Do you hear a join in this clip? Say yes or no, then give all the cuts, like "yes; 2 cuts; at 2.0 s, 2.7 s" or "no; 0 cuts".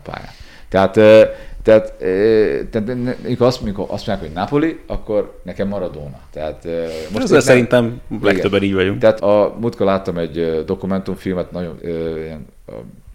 yes; 2 cuts; at 9.2 s, 11.8 s